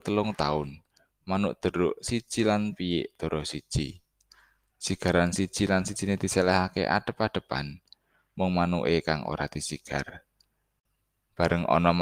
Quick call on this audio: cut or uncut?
cut